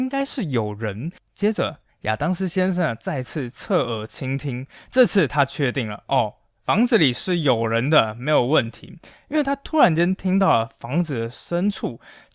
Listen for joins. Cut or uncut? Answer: uncut